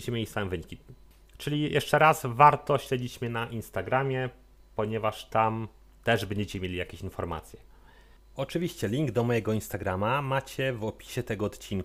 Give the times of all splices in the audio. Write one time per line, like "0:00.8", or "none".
none

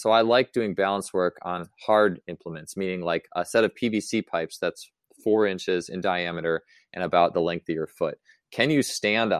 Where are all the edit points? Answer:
none

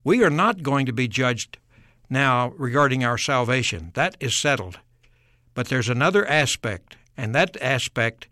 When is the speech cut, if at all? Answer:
none

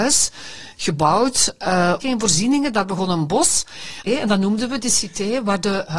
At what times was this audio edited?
0:02.0
0:04.1

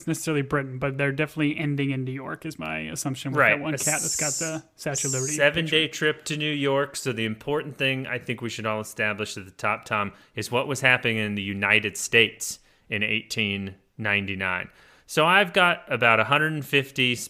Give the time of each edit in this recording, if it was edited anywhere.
none

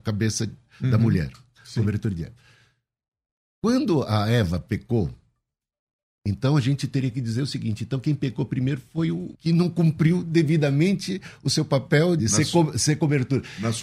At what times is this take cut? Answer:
0:09.3
0:12.2

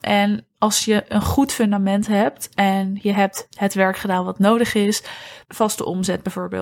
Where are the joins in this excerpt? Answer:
0:05.4

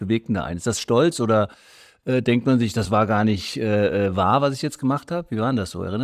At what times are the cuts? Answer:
none

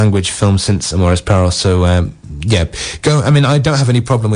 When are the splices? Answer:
none

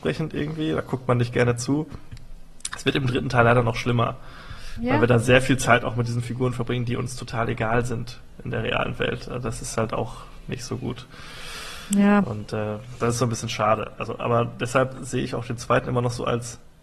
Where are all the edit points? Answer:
none

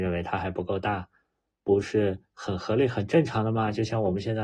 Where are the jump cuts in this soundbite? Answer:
none

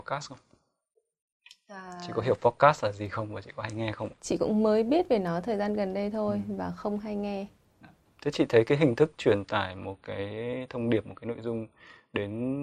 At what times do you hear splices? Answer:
0:04.2
0:08.2

